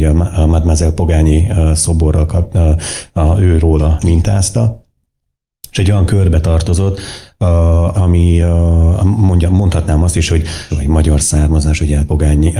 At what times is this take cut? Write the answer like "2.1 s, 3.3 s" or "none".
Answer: 7.9 s, 10.7 s